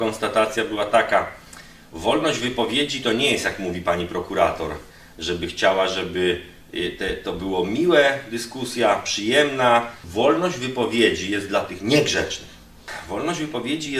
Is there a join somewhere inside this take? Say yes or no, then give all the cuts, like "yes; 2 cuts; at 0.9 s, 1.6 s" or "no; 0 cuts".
no; 0 cuts